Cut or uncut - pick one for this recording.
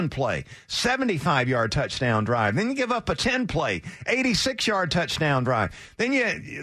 uncut